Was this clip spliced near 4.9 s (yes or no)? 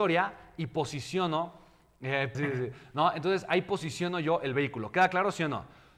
no